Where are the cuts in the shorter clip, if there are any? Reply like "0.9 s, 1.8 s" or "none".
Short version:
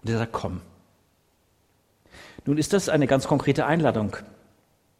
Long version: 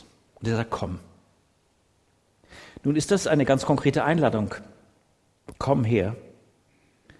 none